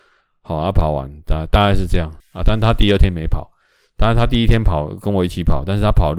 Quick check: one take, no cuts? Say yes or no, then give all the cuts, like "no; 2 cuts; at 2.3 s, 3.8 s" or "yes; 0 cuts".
no; 1 cut; at 2.2 s